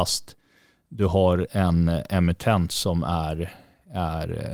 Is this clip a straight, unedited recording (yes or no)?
no